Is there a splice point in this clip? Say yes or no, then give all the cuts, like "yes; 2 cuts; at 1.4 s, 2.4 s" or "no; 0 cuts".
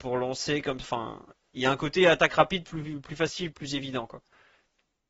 yes; 1 cut; at 2.6 s